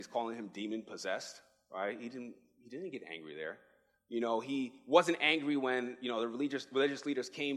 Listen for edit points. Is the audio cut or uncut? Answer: uncut